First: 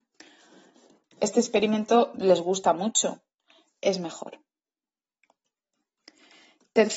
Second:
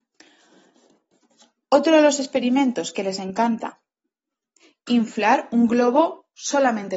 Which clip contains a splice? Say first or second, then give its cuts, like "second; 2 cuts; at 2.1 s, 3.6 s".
first; 2 cuts; at 1.0 s, 3.7 s